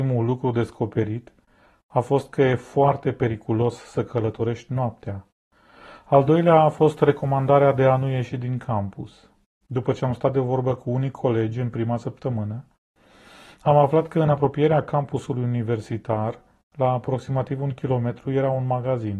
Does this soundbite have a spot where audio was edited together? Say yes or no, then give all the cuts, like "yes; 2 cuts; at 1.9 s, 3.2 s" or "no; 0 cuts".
yes; 1 cut; at 9.6 s